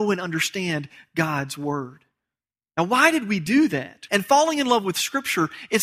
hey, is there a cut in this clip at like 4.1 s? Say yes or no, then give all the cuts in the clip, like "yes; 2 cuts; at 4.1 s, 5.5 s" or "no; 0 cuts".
yes; 1 cut; at 4.1 s